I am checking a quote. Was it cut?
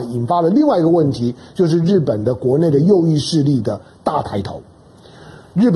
no; 0 cuts

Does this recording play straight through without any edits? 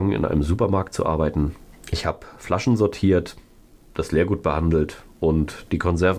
no; 1 cut; at 1.7 s

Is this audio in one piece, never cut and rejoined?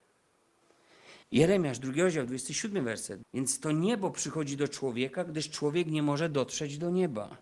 no; 2 cuts; at 1.2 s, 3.2 s

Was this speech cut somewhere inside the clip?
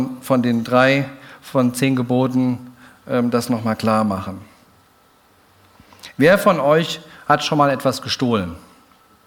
no; 0 cuts

